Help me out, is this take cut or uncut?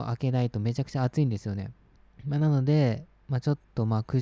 uncut